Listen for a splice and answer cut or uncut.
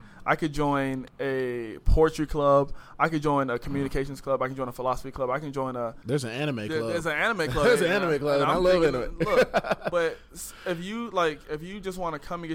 uncut